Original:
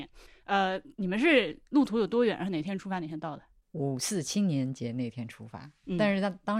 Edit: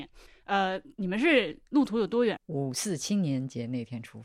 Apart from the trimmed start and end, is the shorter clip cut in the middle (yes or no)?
yes